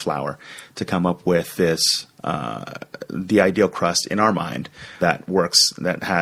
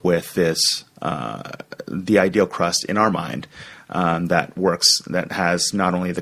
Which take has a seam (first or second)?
first